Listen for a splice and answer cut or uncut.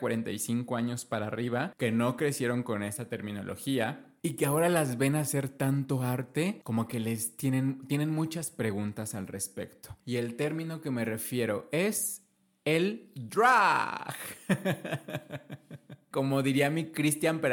uncut